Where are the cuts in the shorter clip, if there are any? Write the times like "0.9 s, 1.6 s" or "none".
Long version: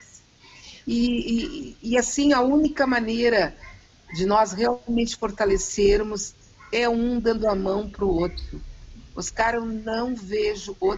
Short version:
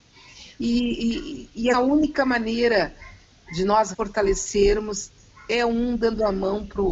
1.7 s, 3.9 s